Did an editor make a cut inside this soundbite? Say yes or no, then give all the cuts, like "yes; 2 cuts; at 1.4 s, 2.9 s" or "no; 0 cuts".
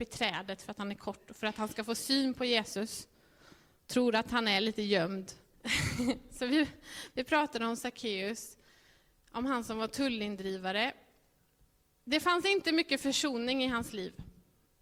yes; 1 cut; at 5.5 s